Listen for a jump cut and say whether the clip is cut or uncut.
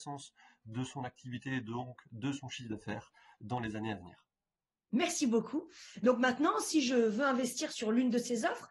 uncut